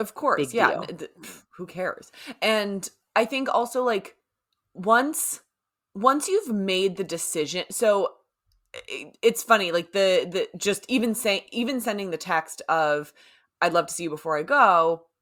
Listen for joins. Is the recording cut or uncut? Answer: uncut